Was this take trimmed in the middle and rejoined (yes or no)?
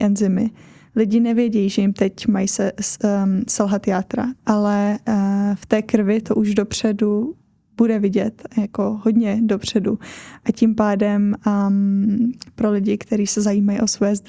yes